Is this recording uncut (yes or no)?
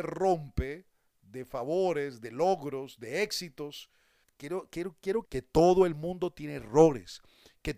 no